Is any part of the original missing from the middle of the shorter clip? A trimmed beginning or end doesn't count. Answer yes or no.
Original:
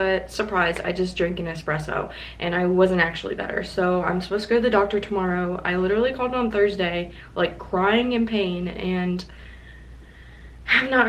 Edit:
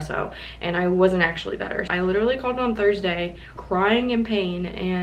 yes